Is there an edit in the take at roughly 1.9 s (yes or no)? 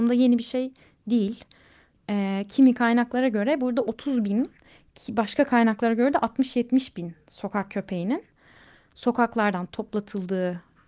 yes